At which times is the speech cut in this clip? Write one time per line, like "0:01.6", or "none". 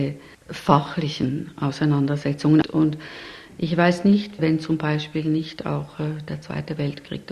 0:02.6
0:04.4